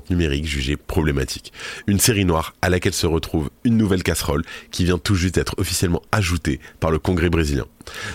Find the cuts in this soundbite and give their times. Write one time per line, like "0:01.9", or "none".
none